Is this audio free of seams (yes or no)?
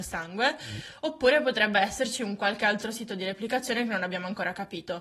yes